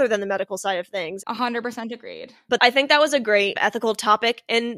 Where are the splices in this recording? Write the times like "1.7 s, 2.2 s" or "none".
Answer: 1.2 s